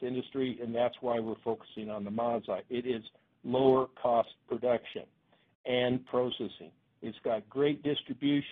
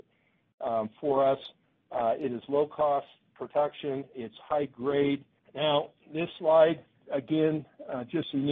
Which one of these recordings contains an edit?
second; 2 cuts; at 5.4 s, 7.0 s

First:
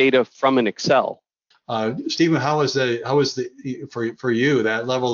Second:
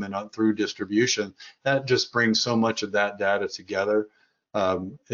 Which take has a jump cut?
first; 1 cut; at 1.5 s

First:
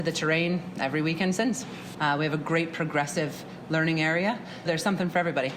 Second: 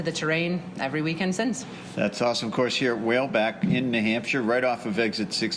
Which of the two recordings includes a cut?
first; 2 cuts; at 1.9 s, 4.7 s

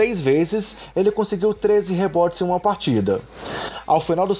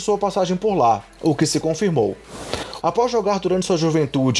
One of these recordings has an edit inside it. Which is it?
second; 1 cut; at 2.8 s

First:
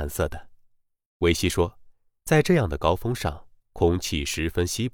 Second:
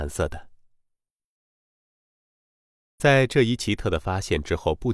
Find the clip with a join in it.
first; 1 cut; at 1.1 s

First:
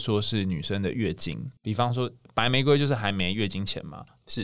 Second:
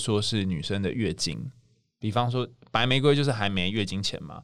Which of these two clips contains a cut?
first; 1 cut; at 1.6 s

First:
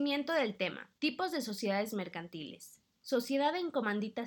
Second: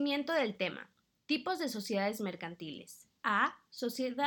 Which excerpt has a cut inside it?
first; 2 cuts; at 1.0 s, 2.9 s

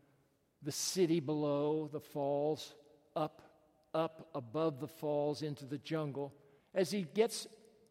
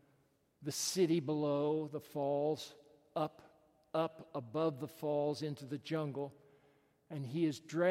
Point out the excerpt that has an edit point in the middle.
first; 1 cut; at 6.6 s

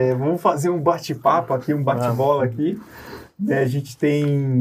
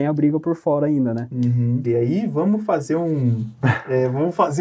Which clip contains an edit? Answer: second; 1 cut; at 1.8 s

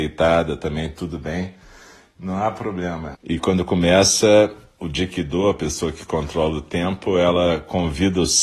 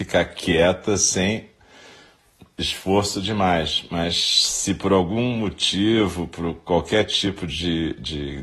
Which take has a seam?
first; 1 cut; at 3.1 s

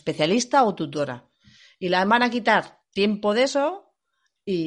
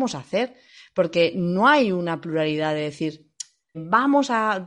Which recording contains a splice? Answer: second; 1 cut; at 3.7 s

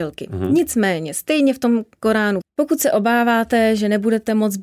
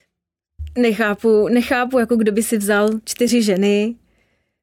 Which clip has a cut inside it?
first; 1 cut; at 2.4 s

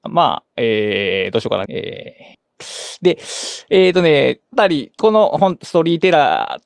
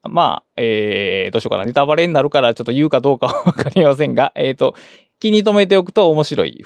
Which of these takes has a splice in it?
first; 2 cuts; at 1.7 s, 4.5 s

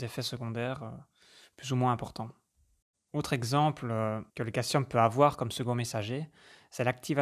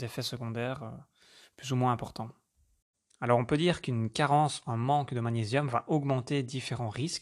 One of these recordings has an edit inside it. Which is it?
first; 2 cuts; at 3.1 s, 4.3 s

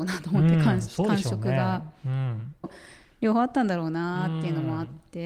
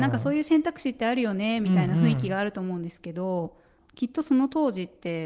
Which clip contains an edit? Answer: first; 1 cut; at 2.6 s

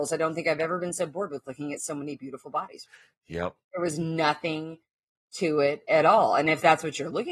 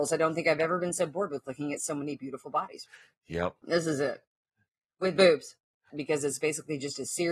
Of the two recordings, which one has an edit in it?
second; 2 cuts; at 3.6 s, 5.9 s

